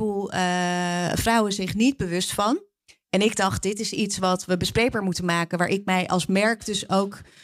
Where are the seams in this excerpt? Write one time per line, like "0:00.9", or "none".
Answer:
none